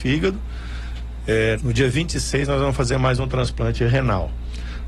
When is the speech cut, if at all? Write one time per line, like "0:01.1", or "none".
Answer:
0:01.6